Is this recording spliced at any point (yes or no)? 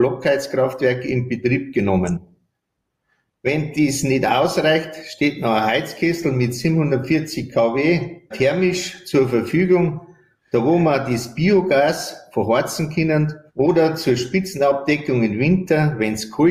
yes